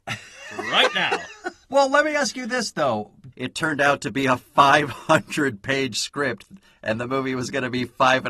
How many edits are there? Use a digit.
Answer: 2